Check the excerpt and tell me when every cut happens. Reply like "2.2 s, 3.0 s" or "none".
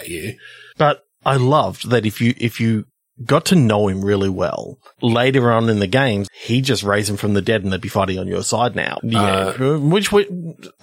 6.3 s, 9.0 s